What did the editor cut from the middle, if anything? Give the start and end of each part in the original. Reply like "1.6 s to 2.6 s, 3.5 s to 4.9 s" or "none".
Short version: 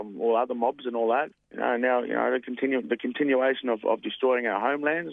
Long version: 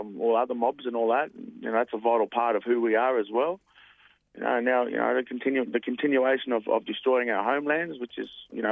1.3 s to 4.1 s